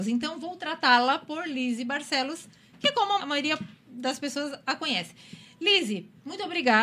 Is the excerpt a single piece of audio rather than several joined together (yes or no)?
no